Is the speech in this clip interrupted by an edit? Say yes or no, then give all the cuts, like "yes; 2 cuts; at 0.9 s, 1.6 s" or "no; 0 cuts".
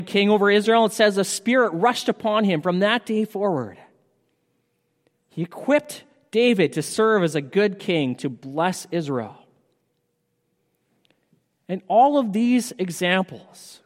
no; 0 cuts